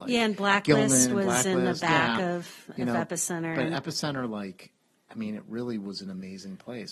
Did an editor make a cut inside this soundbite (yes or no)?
no